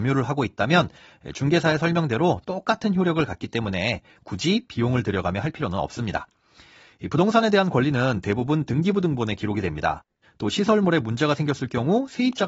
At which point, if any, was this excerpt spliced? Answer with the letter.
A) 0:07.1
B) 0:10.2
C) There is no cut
B